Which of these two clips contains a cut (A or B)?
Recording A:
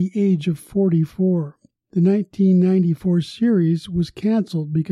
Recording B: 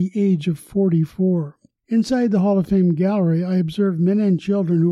B